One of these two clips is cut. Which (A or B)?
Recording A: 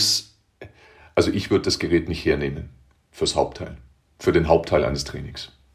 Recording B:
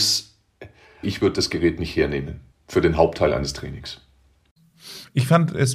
B